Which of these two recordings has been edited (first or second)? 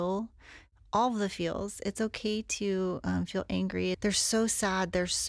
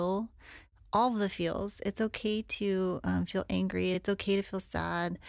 first